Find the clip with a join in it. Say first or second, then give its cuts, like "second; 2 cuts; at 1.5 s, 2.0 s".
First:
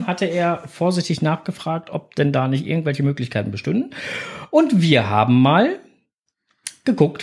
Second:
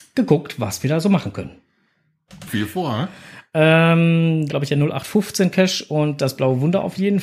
second; 2 cuts; at 2.5 s, 4.5 s